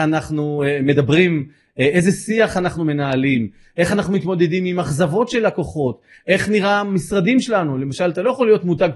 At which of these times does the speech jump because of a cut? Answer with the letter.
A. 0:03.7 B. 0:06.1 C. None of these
B